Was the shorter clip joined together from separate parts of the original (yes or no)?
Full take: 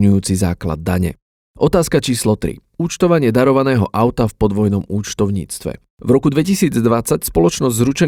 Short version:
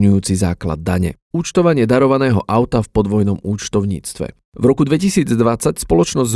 yes